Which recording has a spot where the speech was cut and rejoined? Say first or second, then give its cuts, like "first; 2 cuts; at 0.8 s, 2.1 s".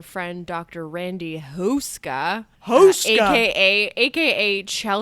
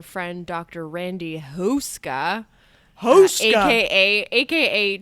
first; 1 cut; at 2.6 s